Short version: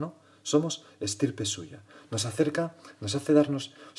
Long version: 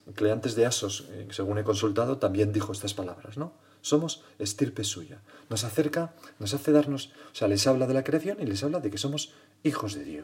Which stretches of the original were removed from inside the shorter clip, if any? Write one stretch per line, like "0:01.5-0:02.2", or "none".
none